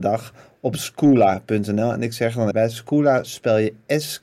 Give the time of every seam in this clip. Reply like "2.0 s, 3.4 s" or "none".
2.5 s